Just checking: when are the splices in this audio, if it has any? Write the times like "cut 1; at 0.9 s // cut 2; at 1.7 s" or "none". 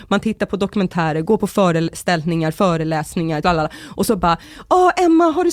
cut 1; at 3.4 s